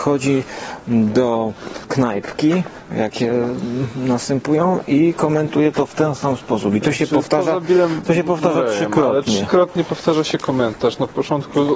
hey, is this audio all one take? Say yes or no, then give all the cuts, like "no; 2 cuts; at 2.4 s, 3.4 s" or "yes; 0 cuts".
no; 1 cut; at 2.9 s